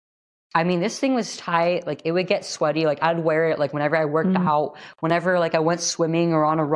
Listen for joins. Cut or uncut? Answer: uncut